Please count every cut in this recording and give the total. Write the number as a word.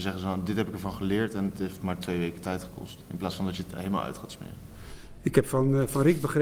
zero